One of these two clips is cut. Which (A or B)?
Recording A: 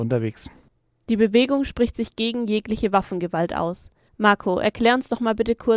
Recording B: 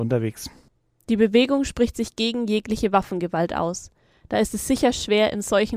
A